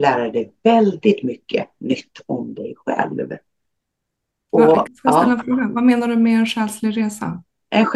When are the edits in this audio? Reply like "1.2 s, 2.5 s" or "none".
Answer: 4.9 s